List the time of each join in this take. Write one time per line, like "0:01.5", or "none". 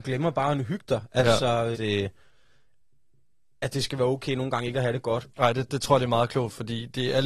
0:01.7
0:05.3